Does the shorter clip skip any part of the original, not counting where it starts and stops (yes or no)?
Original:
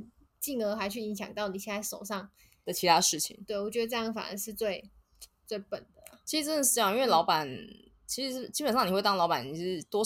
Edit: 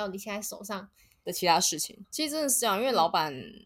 yes